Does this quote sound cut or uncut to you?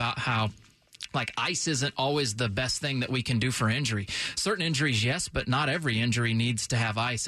uncut